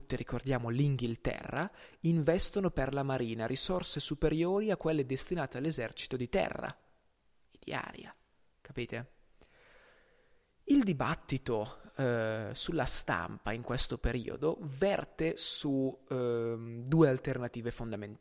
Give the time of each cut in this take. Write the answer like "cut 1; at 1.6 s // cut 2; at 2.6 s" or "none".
none